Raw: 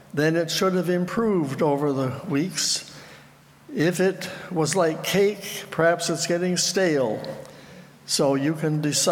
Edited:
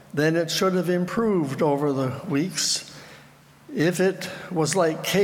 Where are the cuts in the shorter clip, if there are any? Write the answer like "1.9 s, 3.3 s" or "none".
none